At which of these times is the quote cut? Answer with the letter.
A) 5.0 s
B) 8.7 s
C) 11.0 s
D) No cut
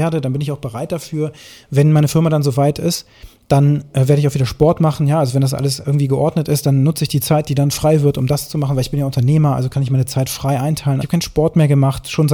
C